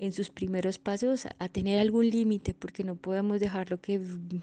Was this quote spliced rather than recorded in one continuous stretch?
no; 0 cuts

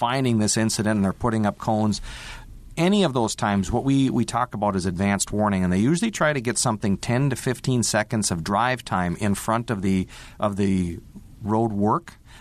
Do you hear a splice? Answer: no; 0 cuts

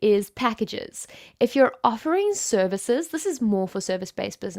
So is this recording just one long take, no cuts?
yes; 0 cuts

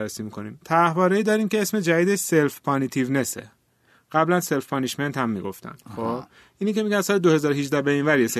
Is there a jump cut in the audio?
no; 0 cuts

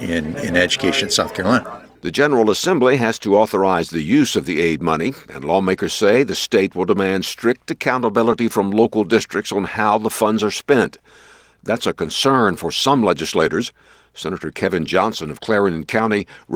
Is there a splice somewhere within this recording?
no; 0 cuts

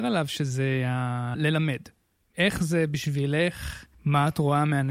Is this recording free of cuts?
no; 1 cut; at 3.9 s

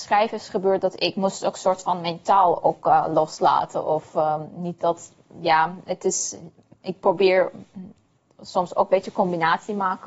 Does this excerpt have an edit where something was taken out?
no; 0 cuts

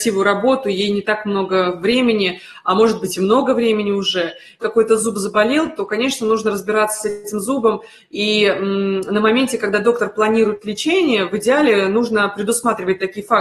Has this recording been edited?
yes; 1 cut; at 4.6 s

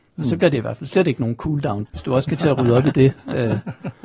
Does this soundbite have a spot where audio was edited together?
yes; 1 cut; at 1.9 s

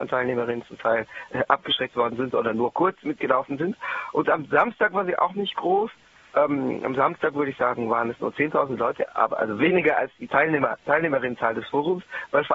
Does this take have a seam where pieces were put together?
no; 0 cuts

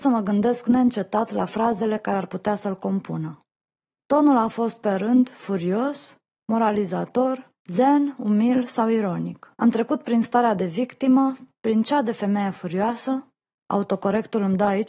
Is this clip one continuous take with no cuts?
no; 1 cut; at 9.5 s

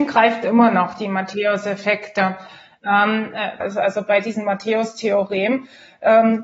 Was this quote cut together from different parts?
yes; 1 cut; at 3.6 s

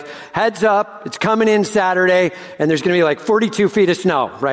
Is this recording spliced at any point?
no; 0 cuts

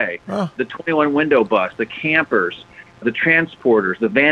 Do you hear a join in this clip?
no; 0 cuts

